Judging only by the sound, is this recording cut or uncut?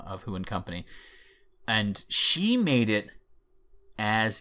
uncut